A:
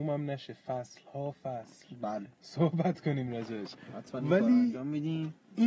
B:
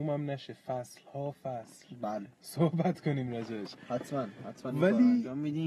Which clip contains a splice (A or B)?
A